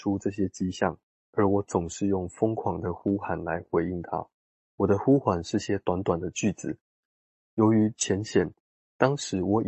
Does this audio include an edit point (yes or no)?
yes